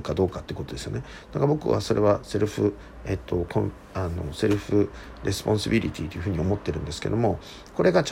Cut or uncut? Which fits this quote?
uncut